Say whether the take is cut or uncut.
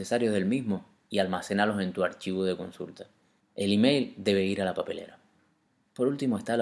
uncut